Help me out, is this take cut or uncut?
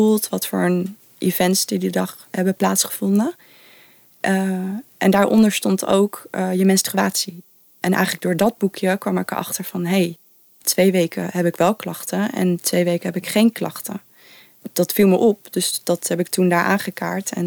uncut